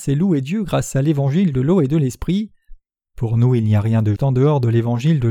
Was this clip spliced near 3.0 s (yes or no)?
yes